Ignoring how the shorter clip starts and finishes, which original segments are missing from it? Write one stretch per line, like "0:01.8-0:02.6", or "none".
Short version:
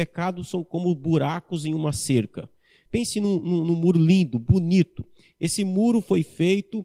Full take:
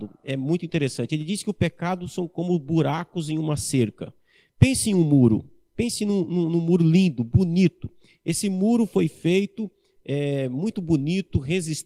0:04.5-0:05.7